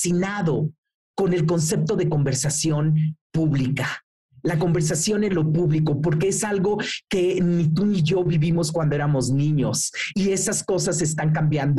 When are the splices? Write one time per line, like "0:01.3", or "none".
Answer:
0:10.1

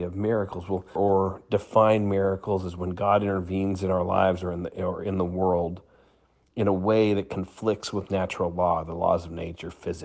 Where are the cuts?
0:01.0

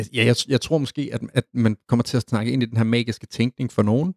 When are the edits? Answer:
0:01.3

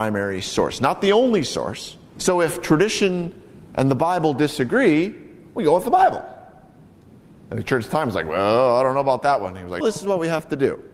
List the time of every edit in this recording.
0:02.2
0:09.8

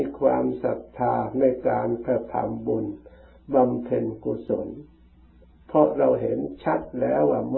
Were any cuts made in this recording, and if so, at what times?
none

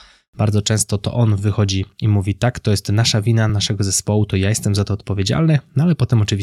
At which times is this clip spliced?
none

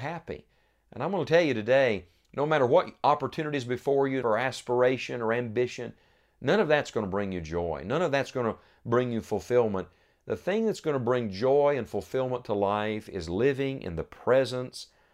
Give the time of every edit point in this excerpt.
0:04.2

